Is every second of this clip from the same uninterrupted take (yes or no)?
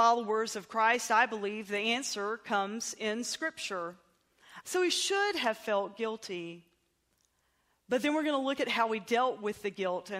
no